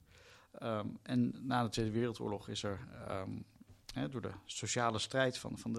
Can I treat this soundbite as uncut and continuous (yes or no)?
yes